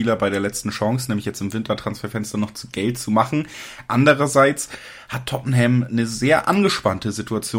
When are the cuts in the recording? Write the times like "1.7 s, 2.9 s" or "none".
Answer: none

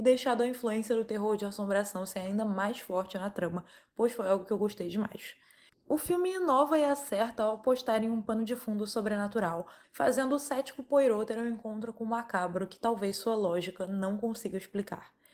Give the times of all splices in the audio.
5.7 s, 9.8 s

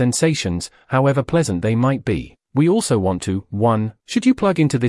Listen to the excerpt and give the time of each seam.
4.0 s

